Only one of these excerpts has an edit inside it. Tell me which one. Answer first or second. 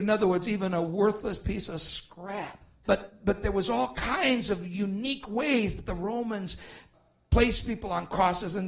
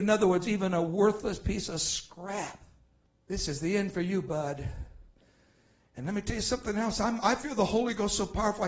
first